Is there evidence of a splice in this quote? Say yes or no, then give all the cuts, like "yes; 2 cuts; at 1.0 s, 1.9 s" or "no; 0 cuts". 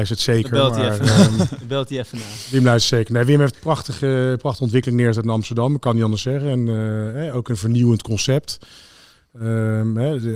no; 0 cuts